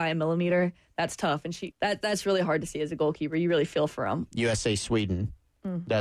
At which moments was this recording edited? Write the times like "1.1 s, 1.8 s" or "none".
1.7 s, 4.3 s